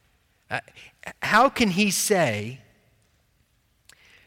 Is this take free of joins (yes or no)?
yes